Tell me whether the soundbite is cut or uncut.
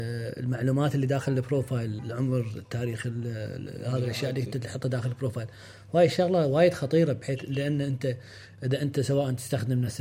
cut